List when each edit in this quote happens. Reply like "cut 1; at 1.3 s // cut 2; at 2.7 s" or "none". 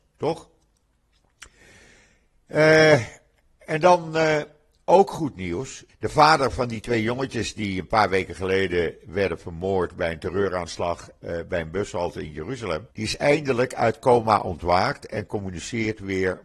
cut 1; at 5.9 s // cut 2; at 12.9 s